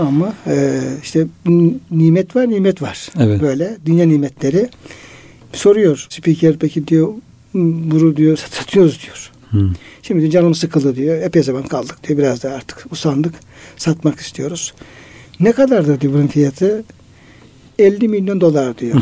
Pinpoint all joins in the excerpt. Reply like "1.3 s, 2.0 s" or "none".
8.4 s